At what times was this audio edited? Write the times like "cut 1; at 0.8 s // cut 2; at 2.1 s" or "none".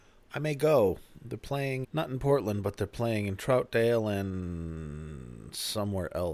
cut 1; at 1.8 s